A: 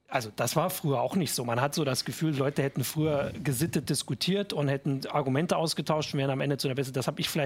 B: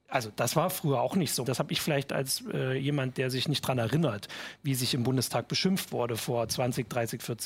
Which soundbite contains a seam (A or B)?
B